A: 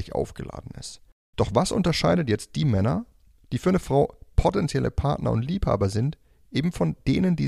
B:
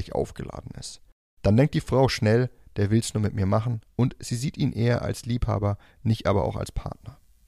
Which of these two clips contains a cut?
A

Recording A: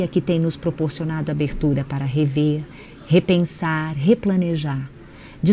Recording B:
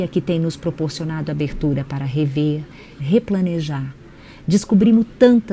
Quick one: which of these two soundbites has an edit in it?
B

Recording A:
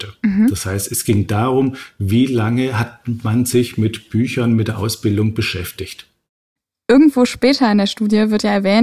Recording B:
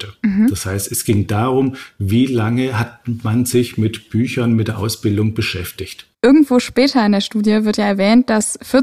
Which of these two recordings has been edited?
B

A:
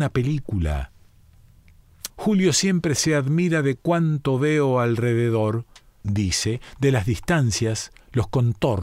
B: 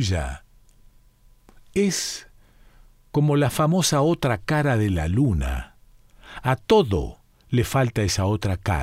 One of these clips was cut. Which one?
A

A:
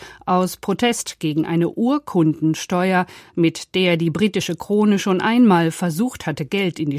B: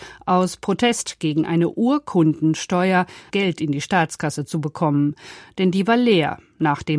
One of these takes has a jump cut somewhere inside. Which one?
B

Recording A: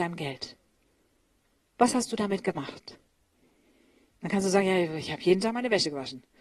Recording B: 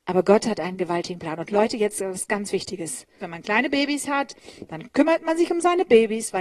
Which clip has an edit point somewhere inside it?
B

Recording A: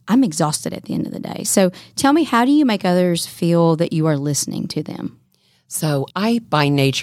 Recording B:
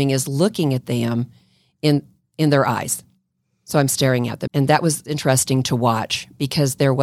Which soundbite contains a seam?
B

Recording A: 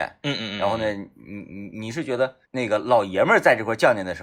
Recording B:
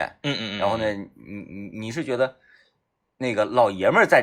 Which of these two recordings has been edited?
A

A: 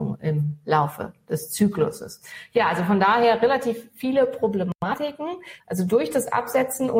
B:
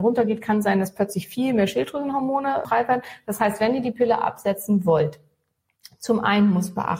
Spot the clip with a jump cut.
A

